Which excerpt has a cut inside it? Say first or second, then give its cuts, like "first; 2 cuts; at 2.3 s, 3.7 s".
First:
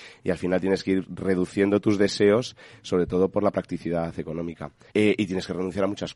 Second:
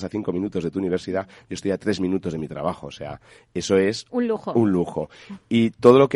first; 1 cut; at 4.9 s